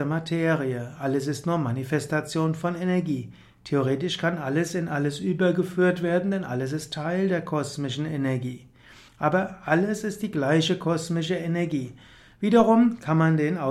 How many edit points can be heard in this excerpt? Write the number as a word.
two